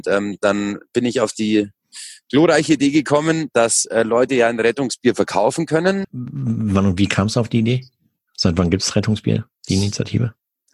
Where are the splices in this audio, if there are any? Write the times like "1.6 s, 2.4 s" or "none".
6.0 s